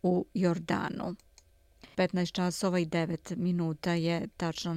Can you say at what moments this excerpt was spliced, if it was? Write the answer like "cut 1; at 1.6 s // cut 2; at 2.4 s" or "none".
cut 1; at 1.9 s